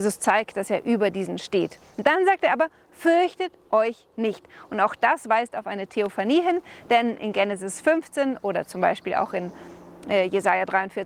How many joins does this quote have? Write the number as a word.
zero